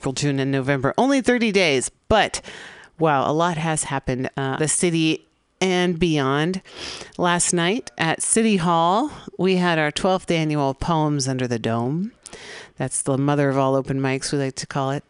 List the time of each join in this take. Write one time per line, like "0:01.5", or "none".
0:04.6